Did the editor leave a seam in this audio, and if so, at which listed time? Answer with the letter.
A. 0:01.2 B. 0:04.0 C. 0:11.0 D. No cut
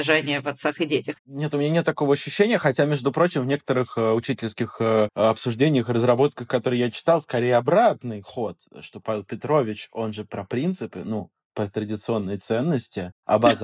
A